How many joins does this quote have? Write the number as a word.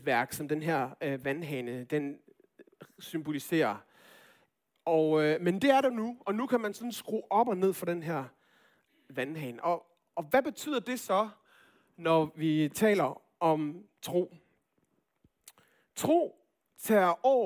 zero